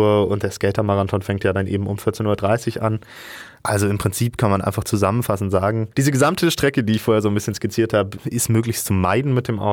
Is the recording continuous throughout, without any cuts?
no; 2 cuts; at 5.9 s, 8.2 s

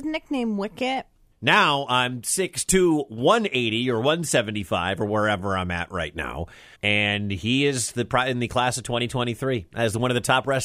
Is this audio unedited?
no; 2 cuts; at 1.3 s, 6.7 s

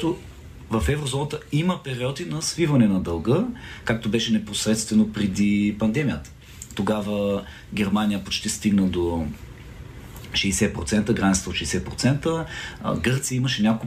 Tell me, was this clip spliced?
no; 0 cuts

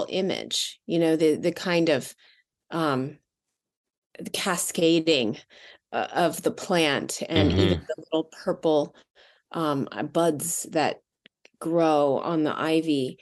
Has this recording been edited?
no; 0 cuts

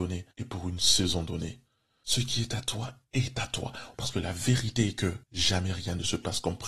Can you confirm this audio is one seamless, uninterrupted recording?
no; 2 cuts; at 3.9 s, 5.2 s

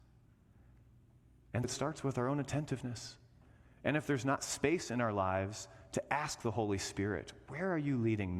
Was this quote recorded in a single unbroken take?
no; 1 cut; at 1.6 s

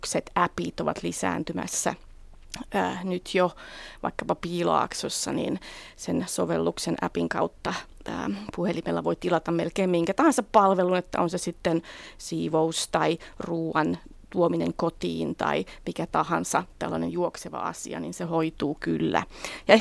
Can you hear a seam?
no; 0 cuts

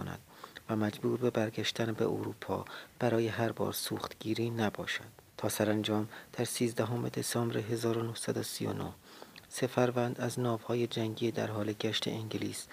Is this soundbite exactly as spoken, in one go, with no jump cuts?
no; 1 cut; at 5.3 s

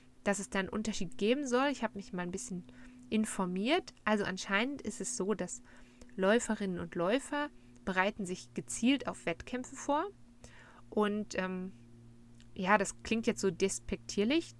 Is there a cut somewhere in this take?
no; 0 cuts

